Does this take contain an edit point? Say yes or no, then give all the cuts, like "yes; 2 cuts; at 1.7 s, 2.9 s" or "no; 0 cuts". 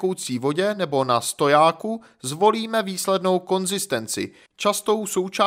yes; 1 cut; at 4.5 s